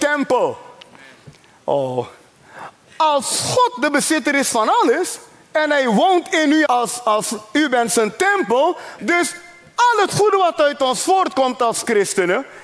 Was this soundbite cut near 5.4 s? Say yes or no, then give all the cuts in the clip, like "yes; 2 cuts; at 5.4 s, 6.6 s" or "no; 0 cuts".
no; 2 cuts; at 6.7 s, 9.0 s